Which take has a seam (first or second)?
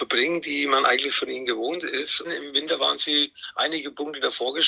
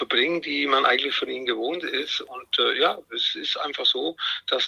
first